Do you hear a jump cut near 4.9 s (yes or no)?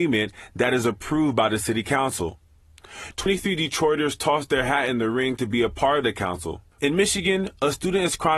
no